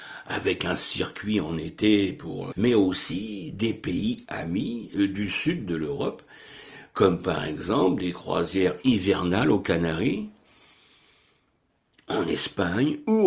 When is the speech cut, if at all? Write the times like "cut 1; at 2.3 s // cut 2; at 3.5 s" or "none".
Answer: cut 1; at 2.5 s